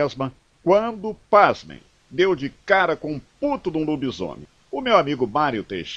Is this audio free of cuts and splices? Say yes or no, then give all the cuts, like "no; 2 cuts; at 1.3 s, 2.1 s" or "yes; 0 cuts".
no; 1 cut; at 4.6 s